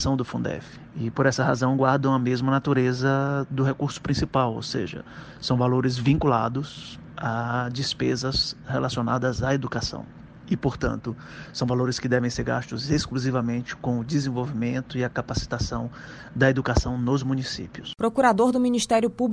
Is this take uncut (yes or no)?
yes